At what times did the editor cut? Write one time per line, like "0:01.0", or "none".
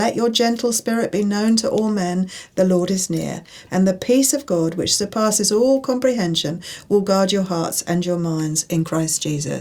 0:03.7